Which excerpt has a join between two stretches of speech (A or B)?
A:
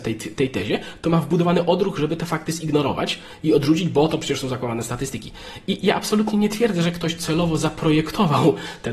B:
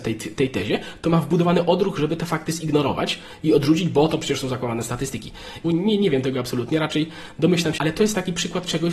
B